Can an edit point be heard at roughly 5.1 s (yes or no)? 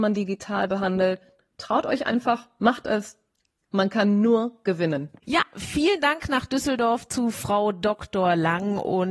no